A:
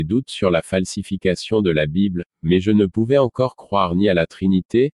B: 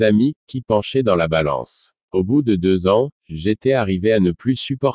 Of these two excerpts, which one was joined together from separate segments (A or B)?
B